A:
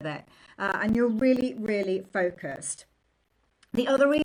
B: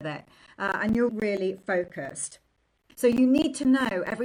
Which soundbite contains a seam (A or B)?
B